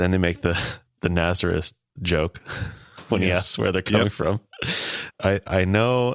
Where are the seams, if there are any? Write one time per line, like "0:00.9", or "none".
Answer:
0:05.1